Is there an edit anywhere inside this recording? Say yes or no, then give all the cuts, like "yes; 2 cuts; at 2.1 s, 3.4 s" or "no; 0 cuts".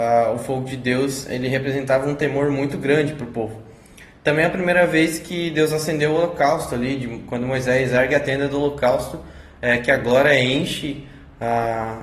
no; 0 cuts